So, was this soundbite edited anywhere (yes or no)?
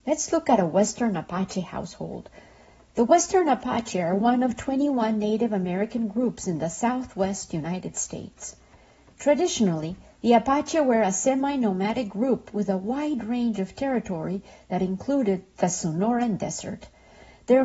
no